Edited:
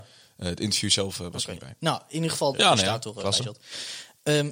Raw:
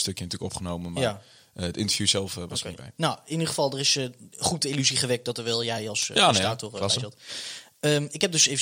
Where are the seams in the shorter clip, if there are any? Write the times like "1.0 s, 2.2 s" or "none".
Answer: 2.5 s